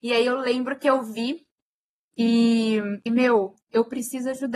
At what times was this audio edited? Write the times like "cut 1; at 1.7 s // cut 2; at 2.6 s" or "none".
cut 1; at 3.1 s